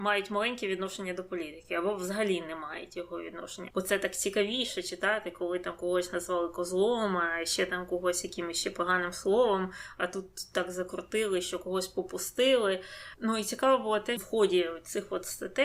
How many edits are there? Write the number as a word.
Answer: three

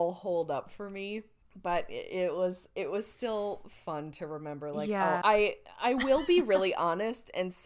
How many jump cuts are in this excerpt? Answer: two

